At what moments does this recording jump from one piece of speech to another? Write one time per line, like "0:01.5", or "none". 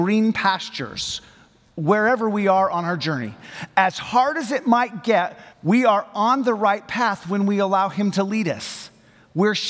0:05.5